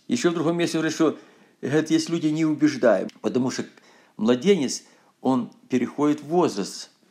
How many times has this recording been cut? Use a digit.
1